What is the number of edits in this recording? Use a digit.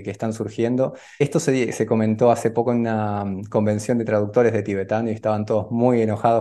0